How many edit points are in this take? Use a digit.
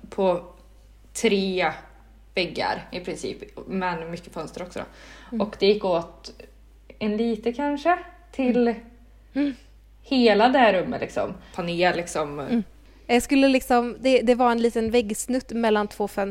2